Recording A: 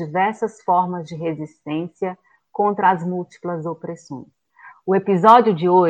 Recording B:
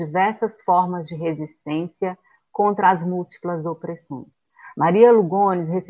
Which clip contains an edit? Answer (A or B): A